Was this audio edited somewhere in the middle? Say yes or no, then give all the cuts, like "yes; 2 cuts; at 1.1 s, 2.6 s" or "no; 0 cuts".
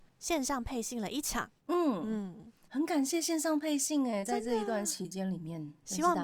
no; 0 cuts